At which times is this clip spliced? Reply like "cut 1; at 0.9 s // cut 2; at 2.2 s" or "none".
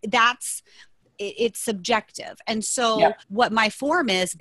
cut 1; at 3.2 s